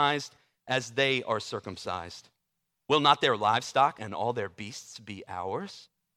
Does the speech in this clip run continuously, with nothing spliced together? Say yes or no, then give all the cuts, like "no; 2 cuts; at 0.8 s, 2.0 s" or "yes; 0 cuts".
no; 1 cut; at 4.0 s